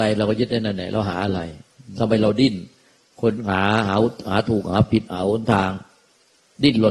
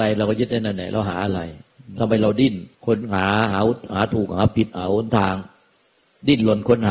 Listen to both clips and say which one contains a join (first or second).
second